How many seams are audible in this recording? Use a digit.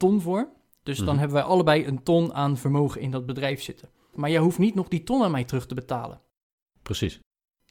1